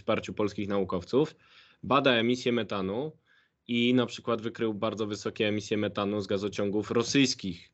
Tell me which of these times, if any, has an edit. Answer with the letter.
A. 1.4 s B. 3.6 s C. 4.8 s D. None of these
D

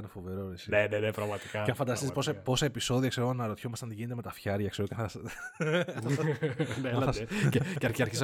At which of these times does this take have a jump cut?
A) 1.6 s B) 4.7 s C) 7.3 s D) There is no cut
D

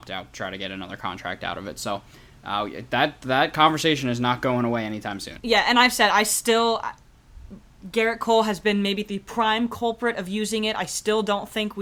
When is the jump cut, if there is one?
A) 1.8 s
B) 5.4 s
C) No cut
B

